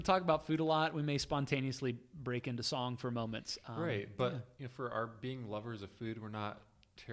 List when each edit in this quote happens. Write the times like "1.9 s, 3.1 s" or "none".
none